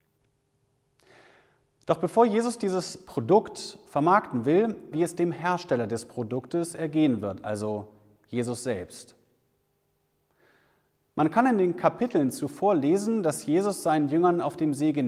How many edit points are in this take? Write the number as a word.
one